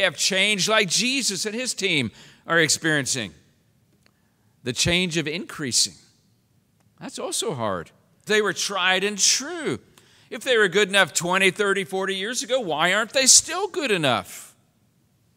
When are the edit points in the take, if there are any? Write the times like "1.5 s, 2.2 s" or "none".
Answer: 8.3 s